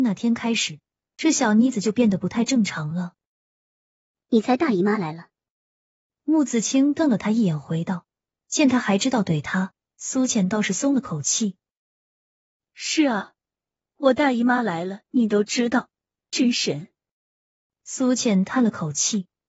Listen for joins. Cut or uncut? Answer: uncut